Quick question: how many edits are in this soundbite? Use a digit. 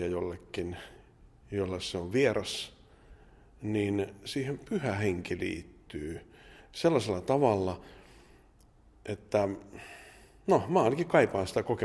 0